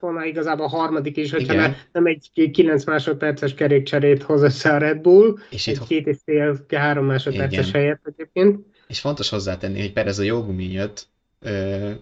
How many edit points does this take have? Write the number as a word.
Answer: zero